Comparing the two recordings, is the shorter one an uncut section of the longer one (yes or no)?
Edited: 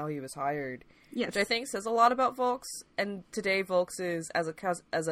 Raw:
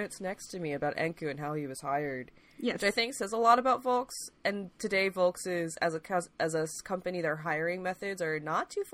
yes